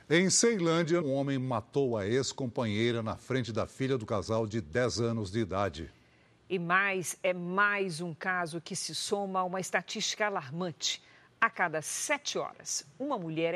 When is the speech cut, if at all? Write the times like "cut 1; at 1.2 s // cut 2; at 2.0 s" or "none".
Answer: cut 1; at 1.0 s